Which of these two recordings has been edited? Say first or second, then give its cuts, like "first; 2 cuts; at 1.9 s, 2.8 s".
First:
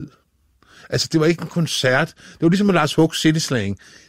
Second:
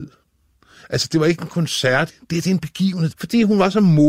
second; 2 cuts; at 2.1 s, 3.1 s